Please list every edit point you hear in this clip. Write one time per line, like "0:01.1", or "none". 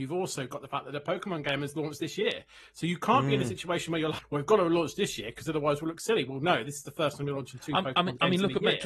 0:04.2